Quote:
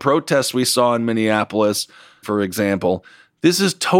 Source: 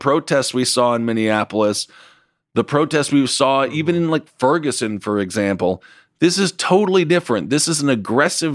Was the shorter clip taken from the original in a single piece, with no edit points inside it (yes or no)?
no